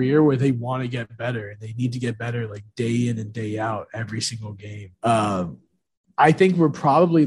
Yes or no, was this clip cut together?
yes